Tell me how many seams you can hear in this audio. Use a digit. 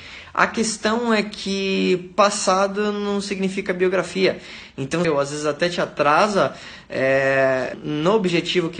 2